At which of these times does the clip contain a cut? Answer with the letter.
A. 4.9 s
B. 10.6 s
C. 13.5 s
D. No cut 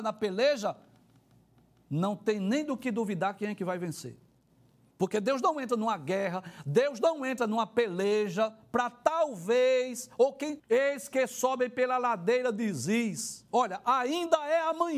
B